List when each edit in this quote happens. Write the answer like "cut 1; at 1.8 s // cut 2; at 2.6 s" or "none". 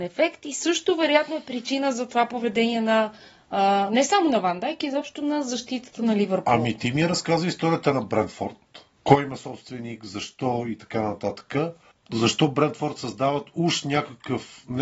none